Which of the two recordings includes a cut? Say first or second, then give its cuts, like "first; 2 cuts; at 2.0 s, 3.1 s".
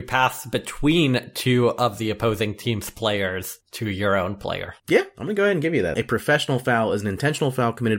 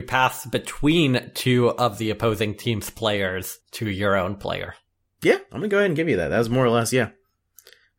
first; 2 cuts; at 4.8 s, 5.9 s